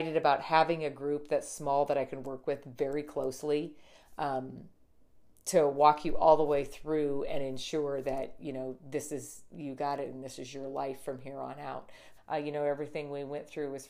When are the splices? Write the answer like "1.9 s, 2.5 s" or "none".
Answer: 12.2 s

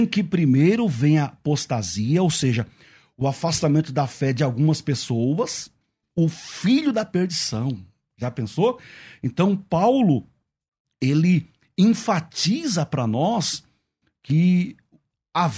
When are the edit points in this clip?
6.0 s

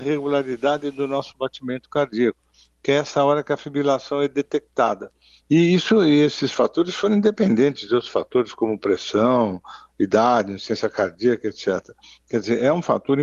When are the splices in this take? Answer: 5.4 s

